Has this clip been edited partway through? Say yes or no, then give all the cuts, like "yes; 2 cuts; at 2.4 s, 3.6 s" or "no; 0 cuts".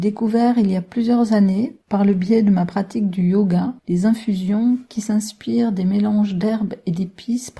yes; 2 cuts; at 1.8 s, 3.8 s